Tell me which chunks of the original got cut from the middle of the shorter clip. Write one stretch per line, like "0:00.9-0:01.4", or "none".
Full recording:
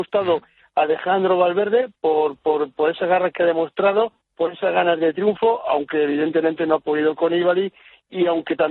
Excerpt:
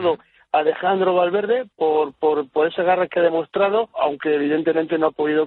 0:04.2-0:05.6

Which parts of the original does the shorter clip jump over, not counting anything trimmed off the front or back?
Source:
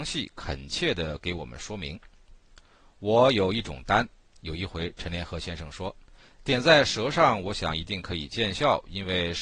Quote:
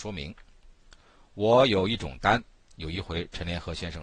none

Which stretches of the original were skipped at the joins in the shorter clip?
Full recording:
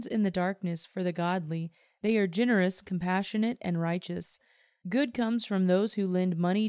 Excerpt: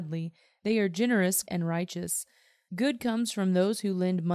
0:02.8-0:03.6

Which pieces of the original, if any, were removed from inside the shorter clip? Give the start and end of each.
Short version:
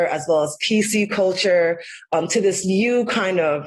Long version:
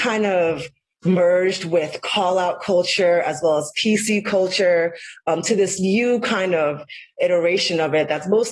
none

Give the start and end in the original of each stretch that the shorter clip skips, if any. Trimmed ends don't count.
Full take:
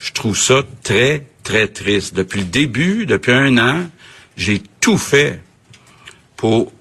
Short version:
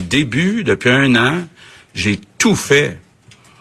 none

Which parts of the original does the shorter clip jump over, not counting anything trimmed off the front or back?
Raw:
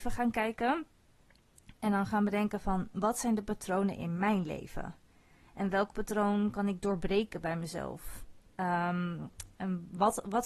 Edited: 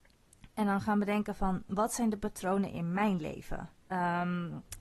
0:05.1-0:08.5

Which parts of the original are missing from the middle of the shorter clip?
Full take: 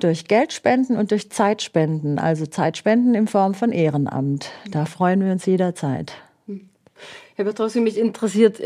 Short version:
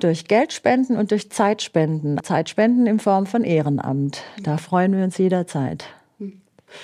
0:02.2-0:02.5

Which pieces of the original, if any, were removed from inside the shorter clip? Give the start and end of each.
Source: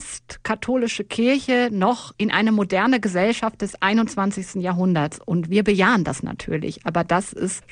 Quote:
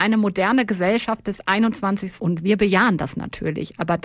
0:04.5-0:05.2

